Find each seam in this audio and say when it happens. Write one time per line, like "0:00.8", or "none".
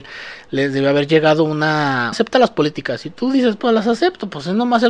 0:02.1
0:03.6